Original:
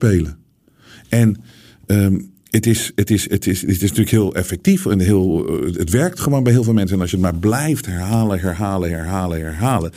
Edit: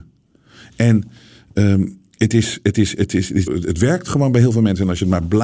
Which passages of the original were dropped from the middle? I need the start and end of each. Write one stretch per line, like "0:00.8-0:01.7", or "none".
0:03.8-0:05.6